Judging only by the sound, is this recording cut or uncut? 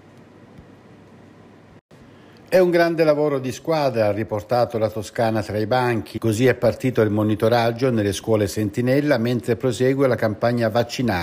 cut